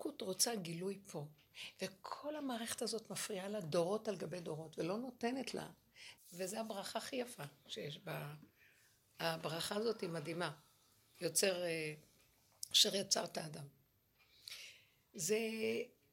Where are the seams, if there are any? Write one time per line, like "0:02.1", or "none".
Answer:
0:06.2